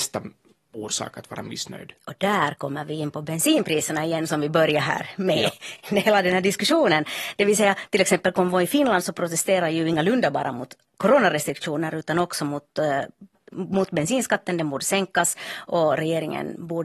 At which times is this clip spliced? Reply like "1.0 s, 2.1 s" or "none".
none